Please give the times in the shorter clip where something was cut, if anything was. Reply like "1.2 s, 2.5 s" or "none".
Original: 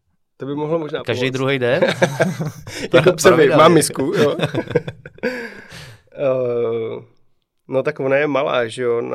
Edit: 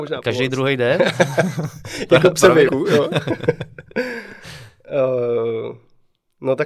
2.7 s